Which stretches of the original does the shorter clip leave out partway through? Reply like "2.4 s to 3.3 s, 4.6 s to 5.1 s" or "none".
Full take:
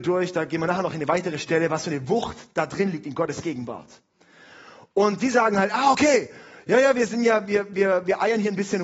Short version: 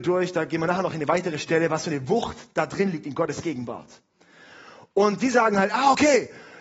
none